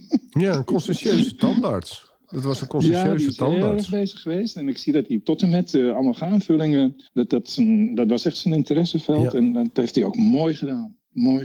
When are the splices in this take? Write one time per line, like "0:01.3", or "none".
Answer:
0:07.0